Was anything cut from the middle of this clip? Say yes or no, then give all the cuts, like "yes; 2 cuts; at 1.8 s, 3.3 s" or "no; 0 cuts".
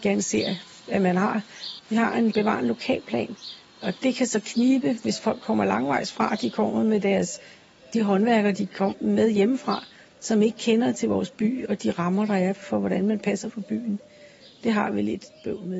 yes; 1 cut; at 1.8 s